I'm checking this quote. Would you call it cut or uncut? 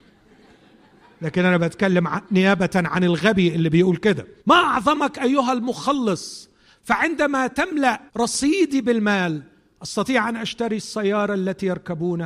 cut